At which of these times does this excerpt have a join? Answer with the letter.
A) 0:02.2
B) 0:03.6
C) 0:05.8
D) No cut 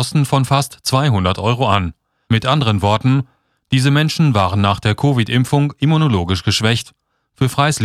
A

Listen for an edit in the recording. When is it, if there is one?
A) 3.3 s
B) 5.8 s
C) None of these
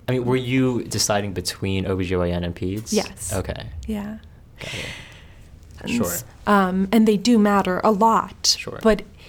B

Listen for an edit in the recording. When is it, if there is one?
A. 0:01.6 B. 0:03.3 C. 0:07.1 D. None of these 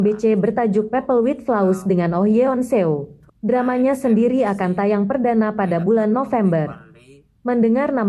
B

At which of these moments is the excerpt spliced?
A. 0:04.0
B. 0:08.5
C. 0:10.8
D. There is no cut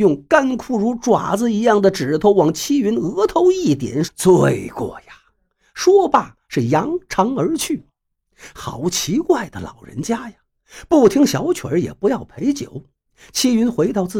A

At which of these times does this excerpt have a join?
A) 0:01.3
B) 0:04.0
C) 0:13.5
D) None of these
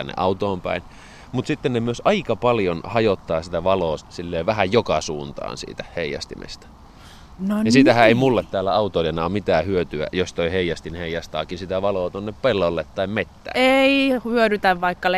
B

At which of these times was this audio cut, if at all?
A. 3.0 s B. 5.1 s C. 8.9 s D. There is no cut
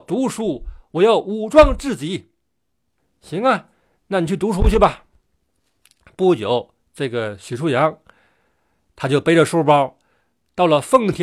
A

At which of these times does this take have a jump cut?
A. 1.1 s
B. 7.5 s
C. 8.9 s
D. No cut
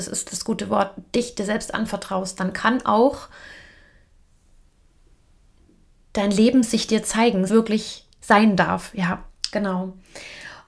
B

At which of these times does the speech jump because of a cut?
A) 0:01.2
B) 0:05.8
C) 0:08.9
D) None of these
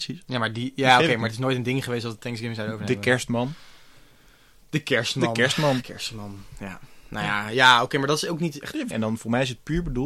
C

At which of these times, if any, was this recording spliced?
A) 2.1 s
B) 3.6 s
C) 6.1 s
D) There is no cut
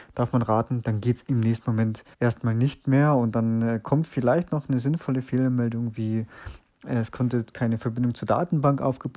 A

